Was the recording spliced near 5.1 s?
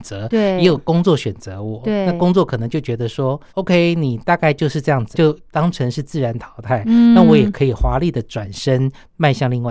yes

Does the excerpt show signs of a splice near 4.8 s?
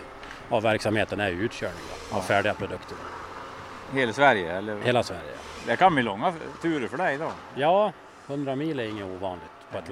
no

